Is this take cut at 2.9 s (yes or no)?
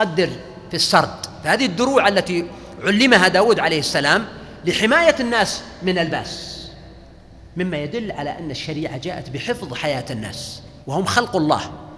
no